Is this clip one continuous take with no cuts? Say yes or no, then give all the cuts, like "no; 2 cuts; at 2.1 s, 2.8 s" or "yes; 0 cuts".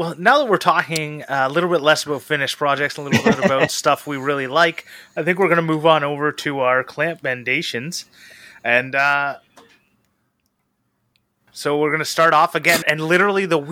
no; 2 cuts; at 11.5 s, 12.8 s